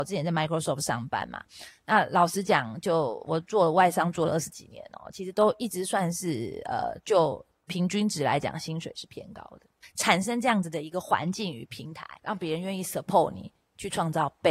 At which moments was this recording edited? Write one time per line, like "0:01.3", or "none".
0:09.8
0:12.2